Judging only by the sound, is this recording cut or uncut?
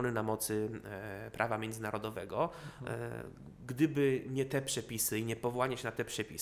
uncut